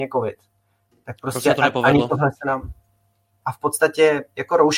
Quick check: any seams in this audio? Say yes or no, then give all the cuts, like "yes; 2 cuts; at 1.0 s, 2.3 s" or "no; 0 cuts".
yes; 1 cut; at 3.4 s